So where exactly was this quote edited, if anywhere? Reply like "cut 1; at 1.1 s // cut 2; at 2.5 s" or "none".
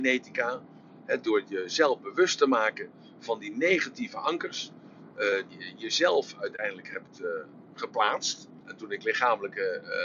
cut 1; at 5.5 s // cut 2; at 8.6 s